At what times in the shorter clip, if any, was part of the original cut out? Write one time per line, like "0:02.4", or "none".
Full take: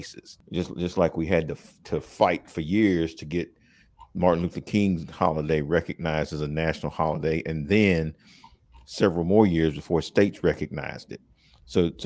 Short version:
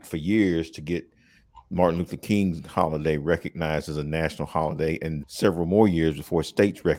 0:05.2